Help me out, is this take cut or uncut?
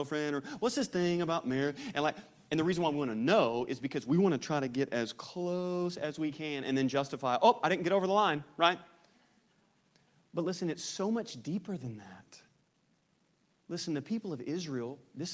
uncut